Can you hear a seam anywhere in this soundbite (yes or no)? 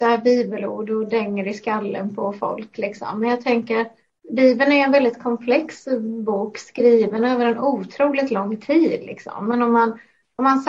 no